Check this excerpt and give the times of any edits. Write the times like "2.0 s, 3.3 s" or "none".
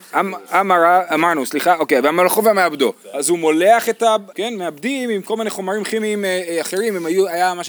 4.3 s